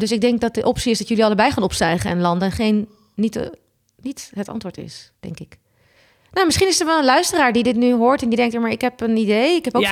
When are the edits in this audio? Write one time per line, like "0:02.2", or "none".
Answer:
none

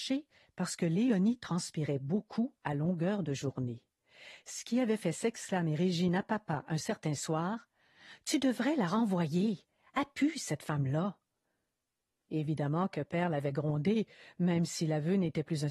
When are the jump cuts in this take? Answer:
none

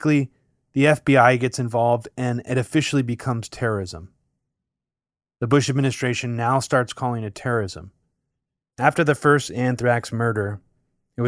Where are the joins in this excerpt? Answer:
0:08.6

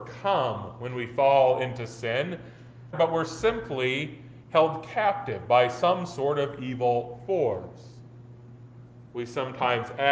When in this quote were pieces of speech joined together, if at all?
0:02.9

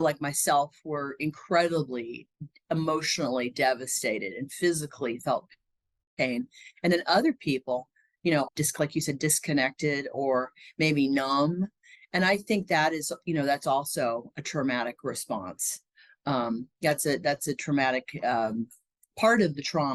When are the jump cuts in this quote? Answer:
0:08.5

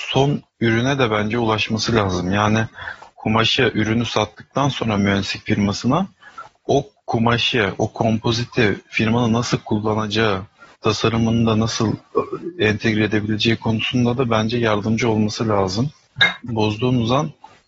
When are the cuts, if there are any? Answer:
0:10.7
0:16.5

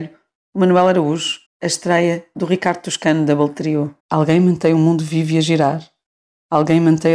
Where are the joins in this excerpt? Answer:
0:01.5
0:04.0

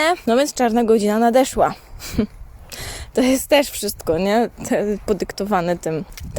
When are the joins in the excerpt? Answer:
none

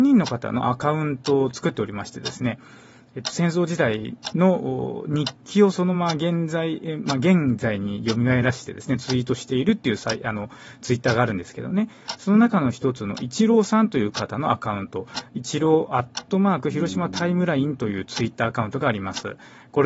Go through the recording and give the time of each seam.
0:05.9

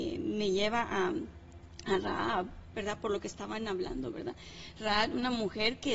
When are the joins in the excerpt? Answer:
none

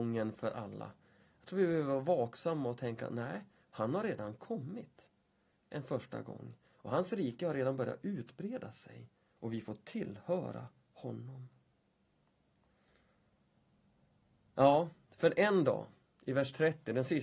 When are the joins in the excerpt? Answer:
none

